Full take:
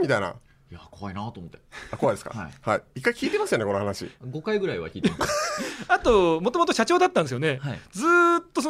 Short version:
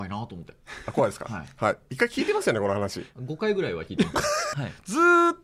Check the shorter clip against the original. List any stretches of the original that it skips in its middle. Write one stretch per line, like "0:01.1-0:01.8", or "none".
0:05.6-0:07.6